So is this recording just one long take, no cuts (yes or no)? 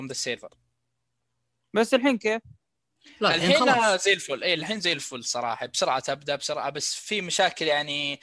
yes